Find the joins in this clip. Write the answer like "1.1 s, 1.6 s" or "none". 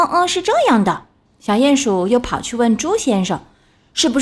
1.3 s

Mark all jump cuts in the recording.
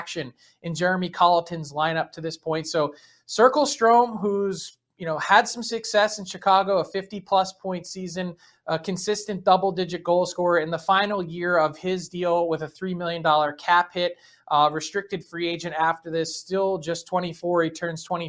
none

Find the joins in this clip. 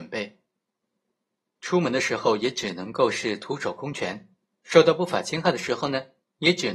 none

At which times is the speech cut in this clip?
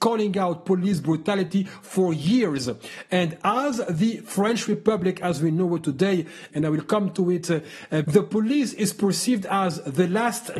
6.5 s, 8.0 s

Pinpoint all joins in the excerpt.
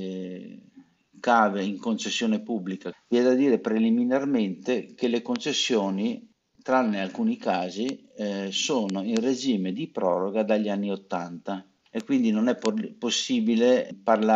2.9 s

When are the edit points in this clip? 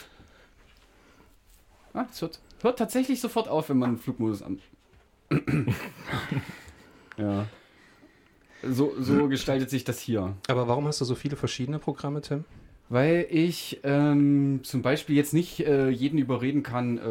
none

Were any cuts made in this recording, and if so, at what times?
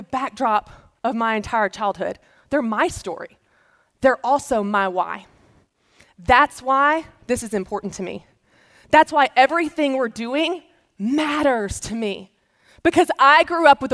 none

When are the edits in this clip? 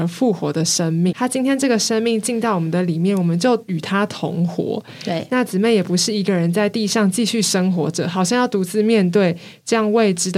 1.1 s

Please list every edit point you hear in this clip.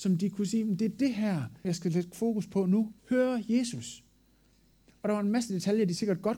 1.6 s, 3.0 s

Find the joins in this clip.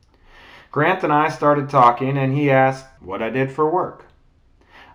3.0 s

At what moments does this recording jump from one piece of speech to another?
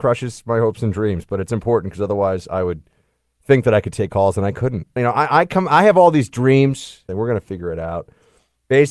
5.0 s, 7.1 s

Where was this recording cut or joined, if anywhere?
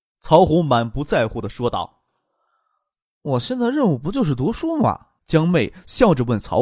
5.2 s

